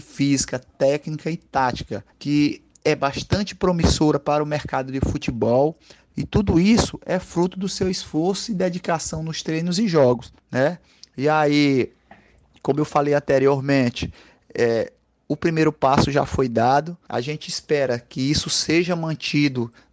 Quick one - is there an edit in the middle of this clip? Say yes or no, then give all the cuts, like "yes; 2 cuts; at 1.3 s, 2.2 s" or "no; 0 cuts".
yes; 1 cut; at 6.1 s